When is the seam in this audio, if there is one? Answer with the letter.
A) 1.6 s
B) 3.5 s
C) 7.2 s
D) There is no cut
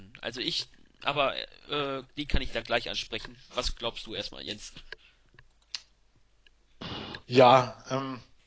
C